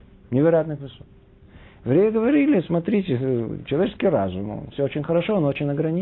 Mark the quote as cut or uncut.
cut